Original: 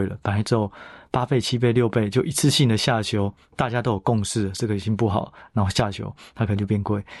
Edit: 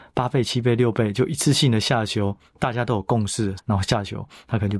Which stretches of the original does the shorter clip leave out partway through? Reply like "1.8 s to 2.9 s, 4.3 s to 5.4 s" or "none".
4.5 s to 5.4 s